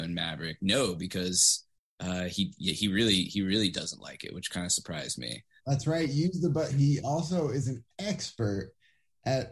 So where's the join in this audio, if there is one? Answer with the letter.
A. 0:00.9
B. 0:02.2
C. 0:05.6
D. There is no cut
C